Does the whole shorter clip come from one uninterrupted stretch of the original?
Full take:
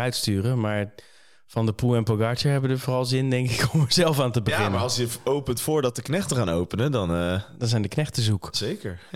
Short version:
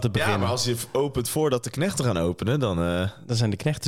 yes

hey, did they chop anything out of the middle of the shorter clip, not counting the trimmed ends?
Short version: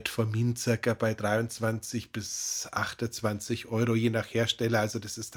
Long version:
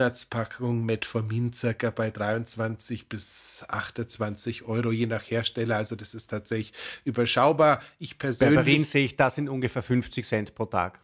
no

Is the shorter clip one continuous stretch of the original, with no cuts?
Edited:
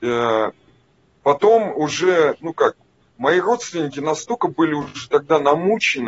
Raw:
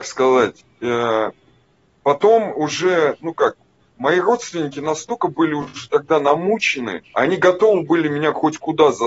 yes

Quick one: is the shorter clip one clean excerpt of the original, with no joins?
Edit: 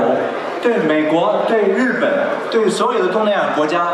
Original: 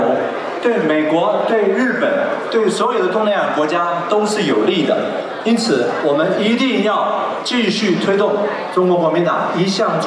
yes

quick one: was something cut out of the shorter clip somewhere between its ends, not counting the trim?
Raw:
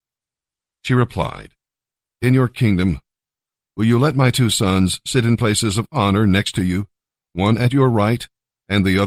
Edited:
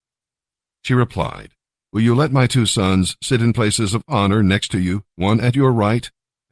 yes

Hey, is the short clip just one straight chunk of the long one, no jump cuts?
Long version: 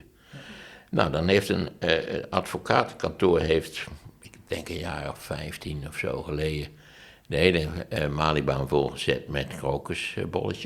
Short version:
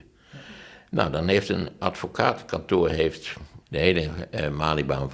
no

